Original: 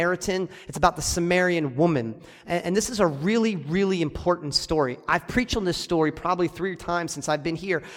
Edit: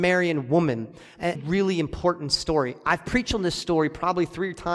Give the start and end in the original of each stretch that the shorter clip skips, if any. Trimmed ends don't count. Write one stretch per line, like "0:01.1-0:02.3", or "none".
0:02.6-0:03.6